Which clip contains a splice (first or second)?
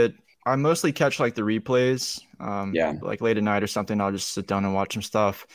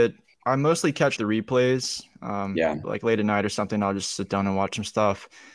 second